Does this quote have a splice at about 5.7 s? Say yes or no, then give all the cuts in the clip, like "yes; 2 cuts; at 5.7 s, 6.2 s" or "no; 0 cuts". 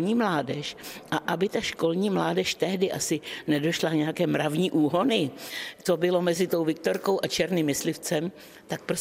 no; 0 cuts